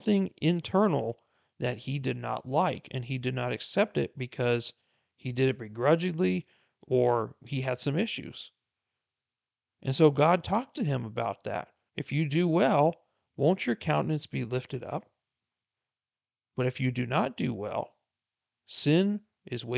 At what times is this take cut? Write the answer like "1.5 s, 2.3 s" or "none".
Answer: 11.9 s